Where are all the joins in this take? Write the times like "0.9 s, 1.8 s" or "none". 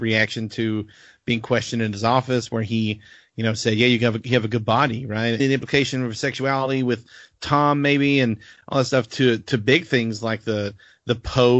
5.4 s